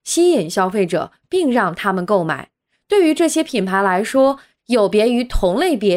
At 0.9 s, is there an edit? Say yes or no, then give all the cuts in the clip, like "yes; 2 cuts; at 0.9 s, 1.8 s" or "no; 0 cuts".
no; 2 cuts; at 2.7 s, 4.6 s